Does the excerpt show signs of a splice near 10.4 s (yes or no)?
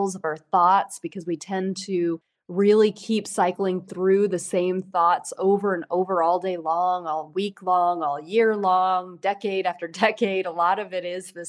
no